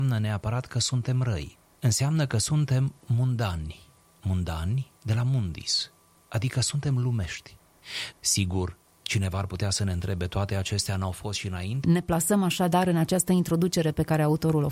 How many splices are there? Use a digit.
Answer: 2